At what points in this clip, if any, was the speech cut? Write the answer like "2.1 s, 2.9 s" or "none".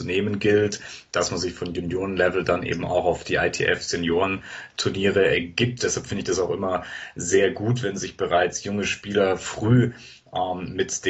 none

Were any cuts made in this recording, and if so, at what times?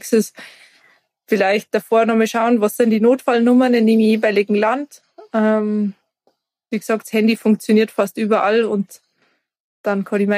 none

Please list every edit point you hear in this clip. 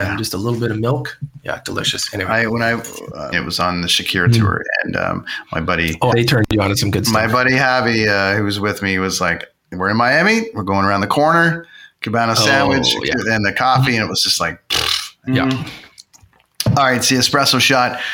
3.3 s, 6.1 s, 15.3 s

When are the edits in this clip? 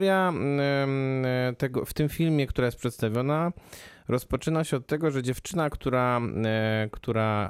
none

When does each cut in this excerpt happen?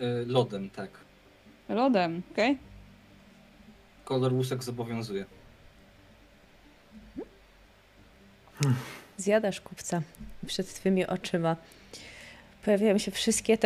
2.3 s

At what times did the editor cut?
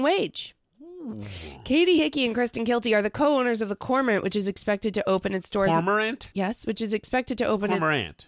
6.3 s

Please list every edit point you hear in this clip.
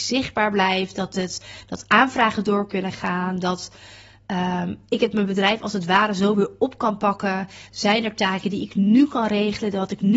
none

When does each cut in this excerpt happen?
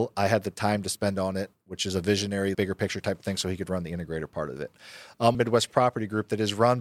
2.5 s, 5.3 s

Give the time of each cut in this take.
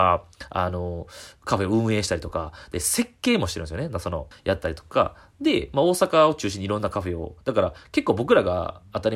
4.3 s

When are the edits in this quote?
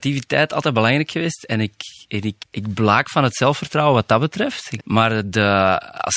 2.4 s, 4.8 s

